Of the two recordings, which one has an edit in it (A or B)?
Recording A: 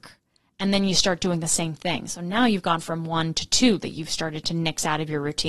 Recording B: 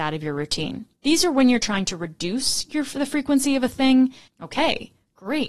B